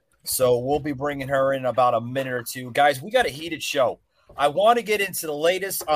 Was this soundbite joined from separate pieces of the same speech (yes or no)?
no